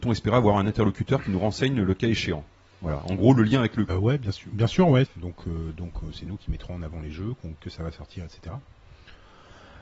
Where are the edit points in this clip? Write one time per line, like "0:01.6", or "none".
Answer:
0:03.9
0:05.0
0:07.6